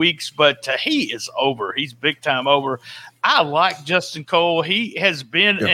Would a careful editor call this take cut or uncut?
uncut